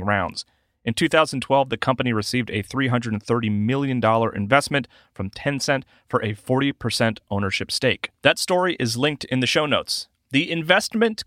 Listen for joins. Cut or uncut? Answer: uncut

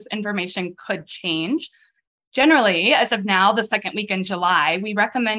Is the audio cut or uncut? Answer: uncut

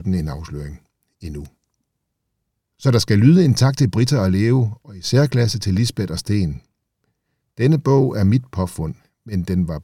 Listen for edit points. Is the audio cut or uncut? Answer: uncut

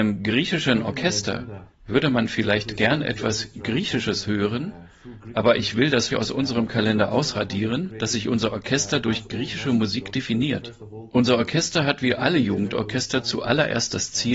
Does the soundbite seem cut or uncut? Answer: cut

